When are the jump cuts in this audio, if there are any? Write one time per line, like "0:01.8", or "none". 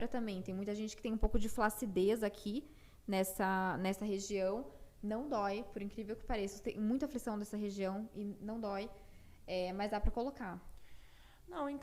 none